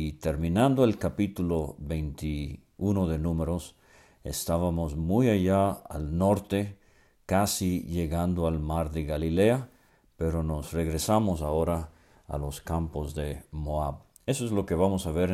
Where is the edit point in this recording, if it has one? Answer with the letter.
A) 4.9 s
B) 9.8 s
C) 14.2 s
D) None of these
D